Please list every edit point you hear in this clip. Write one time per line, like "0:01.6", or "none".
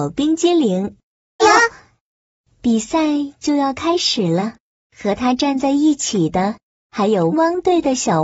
0:01.4
0:04.8
0:07.3

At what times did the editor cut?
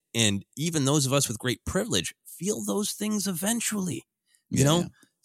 none

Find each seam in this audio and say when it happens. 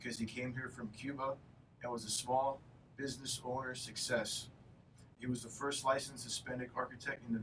none

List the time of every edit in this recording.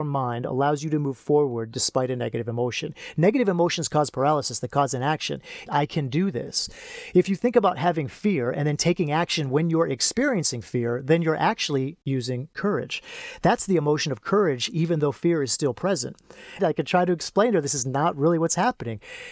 0:05.7
0:07.1
0:16.6

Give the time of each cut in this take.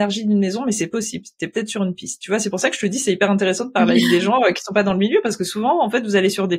none

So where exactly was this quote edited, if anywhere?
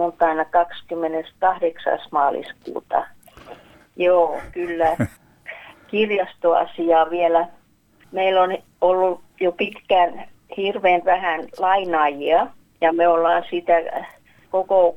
0:03.8

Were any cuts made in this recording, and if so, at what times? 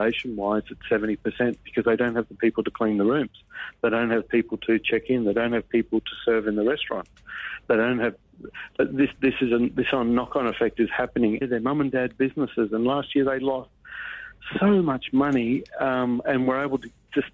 0:09.2
0:11.4

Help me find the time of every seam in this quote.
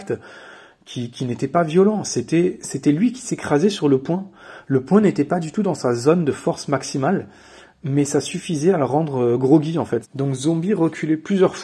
0:10.0

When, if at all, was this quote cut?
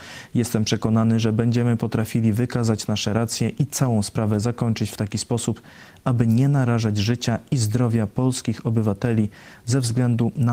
none

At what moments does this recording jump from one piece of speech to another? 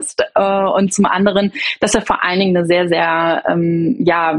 none

